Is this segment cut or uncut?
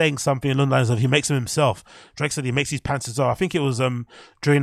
uncut